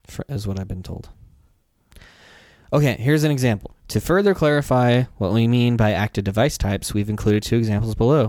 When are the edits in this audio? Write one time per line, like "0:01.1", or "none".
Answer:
0:03.8

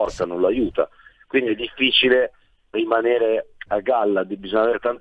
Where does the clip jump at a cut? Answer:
0:02.7

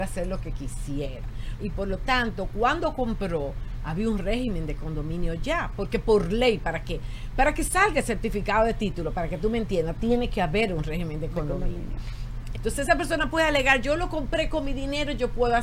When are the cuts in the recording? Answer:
0:01.6
0:12.5

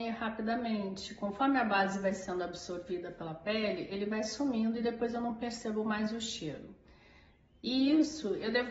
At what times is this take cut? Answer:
none

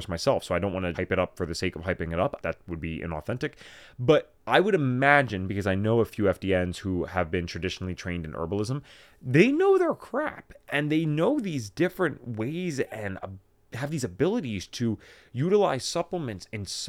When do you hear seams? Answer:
0:00.9
0:02.4

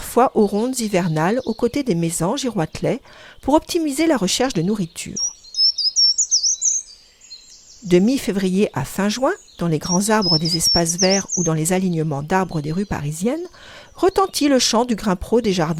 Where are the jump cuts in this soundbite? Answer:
none

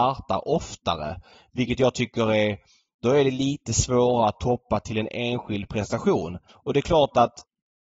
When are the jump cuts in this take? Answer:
0:06.5

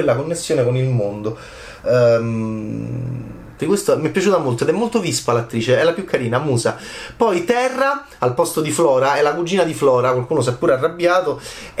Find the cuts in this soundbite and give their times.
0:03.6

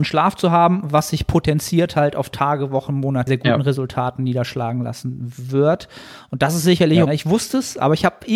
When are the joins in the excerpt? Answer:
0:03.3
0:07.1

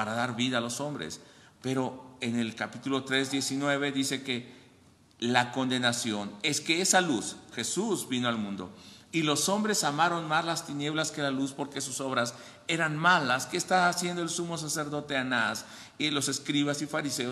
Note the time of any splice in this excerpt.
0:07.5

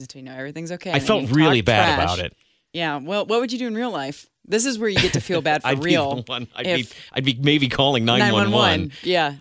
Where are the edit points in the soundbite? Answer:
none

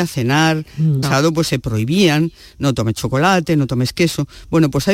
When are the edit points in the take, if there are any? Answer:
0:01.0

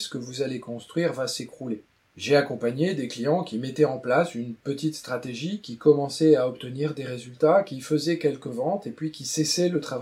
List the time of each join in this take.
none

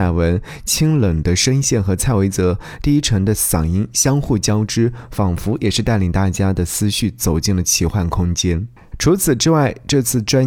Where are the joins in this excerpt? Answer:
0:08.9

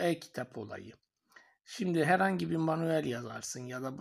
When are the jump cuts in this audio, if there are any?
none

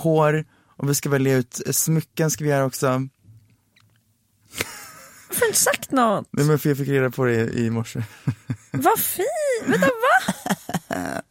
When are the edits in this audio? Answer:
none

